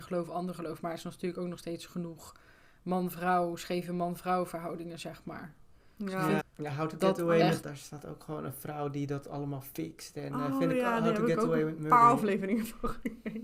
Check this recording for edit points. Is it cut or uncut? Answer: cut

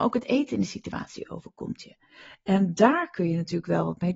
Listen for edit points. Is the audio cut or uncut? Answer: uncut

